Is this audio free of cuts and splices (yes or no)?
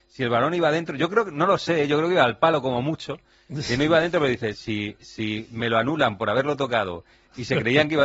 no